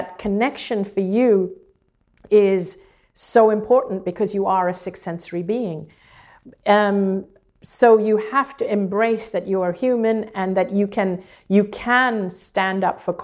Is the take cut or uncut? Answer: uncut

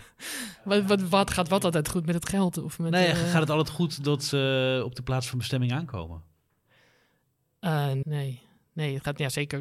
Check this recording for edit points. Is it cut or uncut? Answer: cut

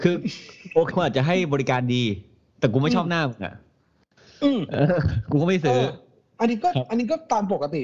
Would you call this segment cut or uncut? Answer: cut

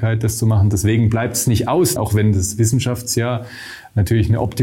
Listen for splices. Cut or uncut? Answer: cut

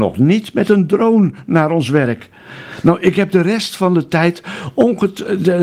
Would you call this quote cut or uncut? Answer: uncut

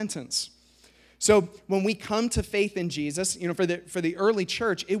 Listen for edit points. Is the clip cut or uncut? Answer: uncut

